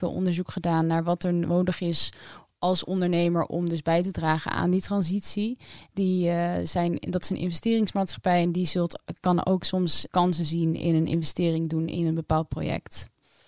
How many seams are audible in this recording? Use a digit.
2